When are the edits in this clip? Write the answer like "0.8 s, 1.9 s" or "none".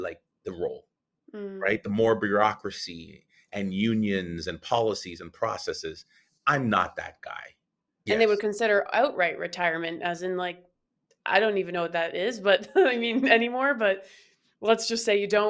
8.1 s